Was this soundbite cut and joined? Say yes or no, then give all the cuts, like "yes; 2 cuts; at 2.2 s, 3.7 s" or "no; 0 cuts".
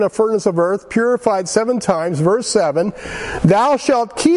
no; 0 cuts